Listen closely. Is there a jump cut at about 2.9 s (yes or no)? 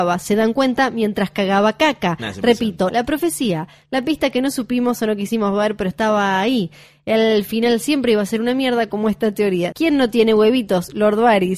yes